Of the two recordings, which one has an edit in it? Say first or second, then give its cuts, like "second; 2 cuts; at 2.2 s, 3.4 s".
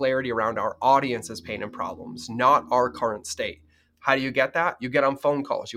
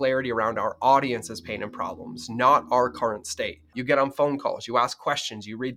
second; 1 cut; at 3.7 s